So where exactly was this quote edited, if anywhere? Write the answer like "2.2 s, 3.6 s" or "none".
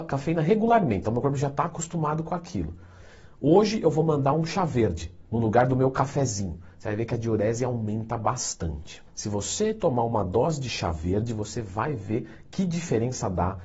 5.3 s, 9.1 s